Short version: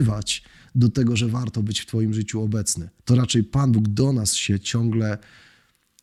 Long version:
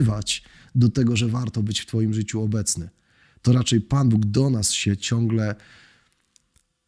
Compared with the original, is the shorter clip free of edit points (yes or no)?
no